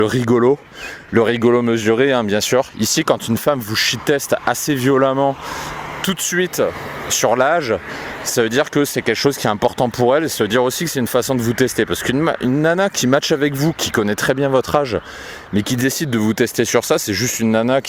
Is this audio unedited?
yes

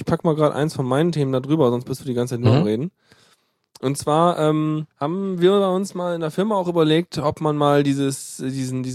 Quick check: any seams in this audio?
yes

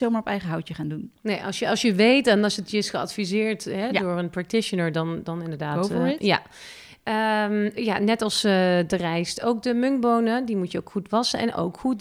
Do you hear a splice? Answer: no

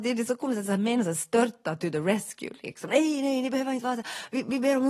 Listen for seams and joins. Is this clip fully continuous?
yes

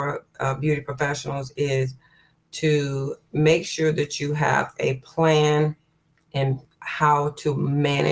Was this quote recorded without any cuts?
yes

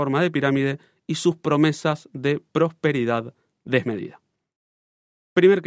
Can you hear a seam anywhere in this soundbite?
no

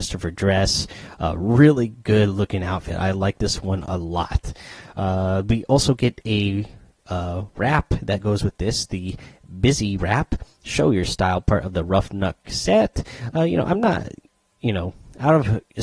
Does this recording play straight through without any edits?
yes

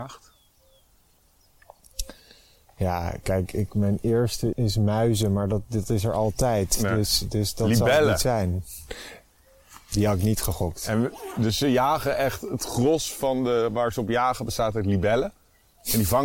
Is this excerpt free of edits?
no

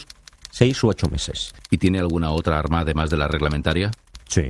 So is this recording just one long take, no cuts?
yes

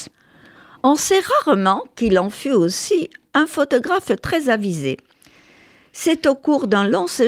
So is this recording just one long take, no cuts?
yes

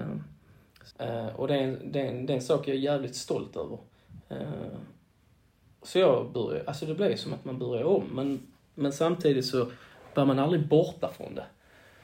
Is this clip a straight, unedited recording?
no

